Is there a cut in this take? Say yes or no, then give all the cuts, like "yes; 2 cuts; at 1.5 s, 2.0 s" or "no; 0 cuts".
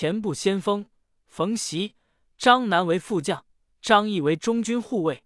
yes; 1 cut; at 3.7 s